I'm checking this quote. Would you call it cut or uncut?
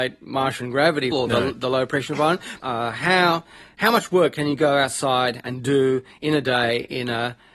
cut